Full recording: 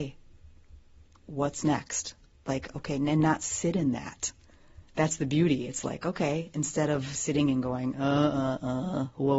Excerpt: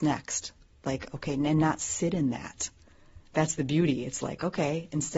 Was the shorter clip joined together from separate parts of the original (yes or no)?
no